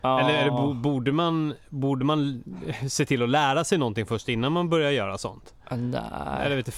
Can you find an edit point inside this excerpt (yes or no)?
no